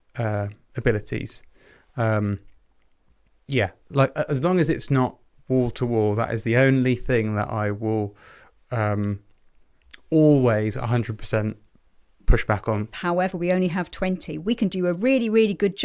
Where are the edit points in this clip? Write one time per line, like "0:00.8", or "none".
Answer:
0:12.9